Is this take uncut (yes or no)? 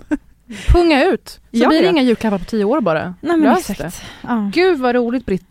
yes